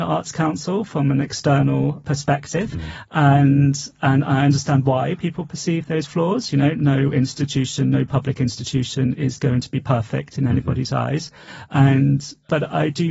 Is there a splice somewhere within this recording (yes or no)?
no